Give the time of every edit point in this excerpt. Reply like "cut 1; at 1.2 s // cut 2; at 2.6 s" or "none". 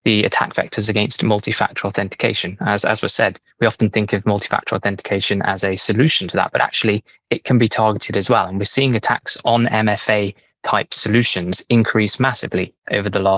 none